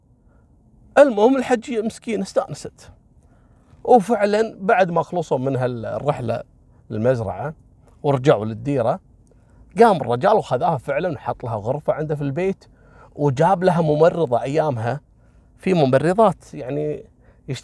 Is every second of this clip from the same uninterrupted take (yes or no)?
yes